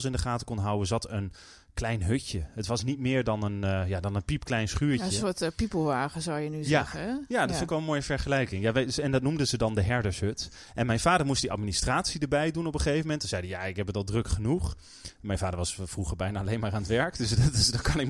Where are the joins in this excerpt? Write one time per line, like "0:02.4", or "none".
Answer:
none